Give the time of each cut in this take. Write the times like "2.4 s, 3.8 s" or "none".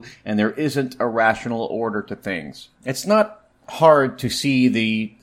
2.8 s

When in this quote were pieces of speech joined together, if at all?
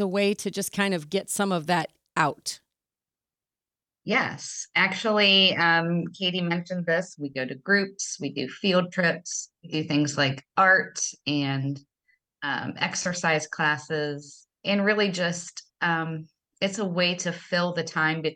7.1 s, 9.6 s, 14.5 s

